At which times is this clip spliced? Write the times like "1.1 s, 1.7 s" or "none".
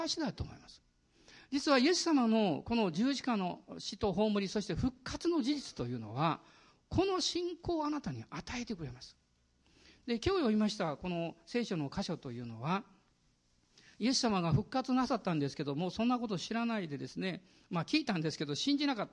none